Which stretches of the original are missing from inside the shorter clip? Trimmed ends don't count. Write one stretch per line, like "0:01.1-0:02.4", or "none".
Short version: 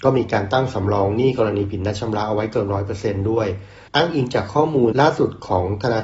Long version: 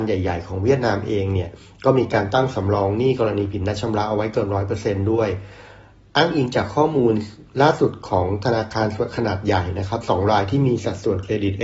0:05.7-0:06.1
0:07.1-0:07.5